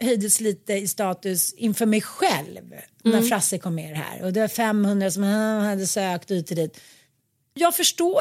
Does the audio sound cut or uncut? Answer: uncut